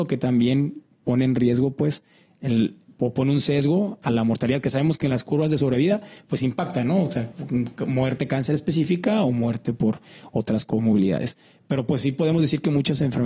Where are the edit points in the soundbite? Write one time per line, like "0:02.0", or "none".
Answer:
none